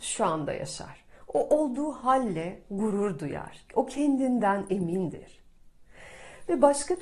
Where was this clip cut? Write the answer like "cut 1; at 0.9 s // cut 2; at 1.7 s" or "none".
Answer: none